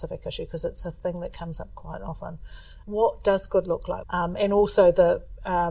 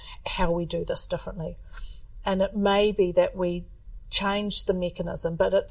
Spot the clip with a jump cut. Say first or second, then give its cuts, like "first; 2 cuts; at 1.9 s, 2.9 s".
first; 2 cuts; at 2.8 s, 4.0 s